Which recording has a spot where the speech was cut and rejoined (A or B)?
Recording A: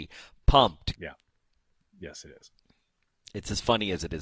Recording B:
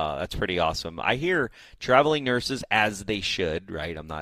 A